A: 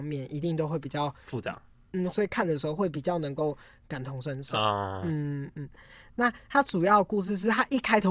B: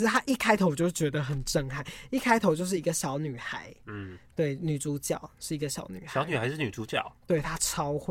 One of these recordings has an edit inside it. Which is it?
A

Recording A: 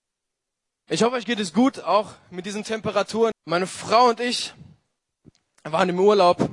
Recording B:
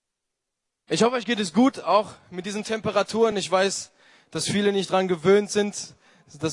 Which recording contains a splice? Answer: A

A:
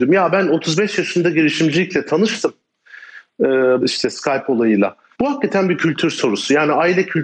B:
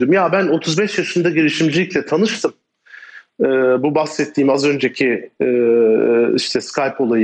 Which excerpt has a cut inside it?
A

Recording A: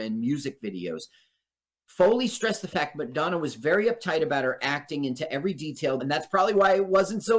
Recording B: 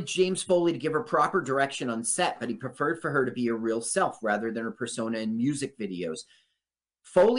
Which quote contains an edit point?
A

